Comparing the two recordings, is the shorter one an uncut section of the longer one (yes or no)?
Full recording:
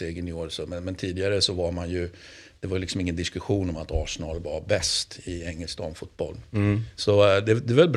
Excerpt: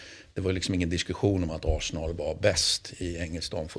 yes